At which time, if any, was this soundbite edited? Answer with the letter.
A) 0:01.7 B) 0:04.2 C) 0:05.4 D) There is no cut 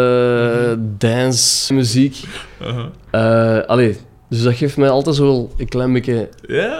A